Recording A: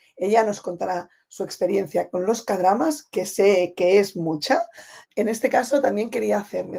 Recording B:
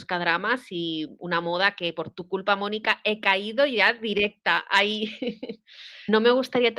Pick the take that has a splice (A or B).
A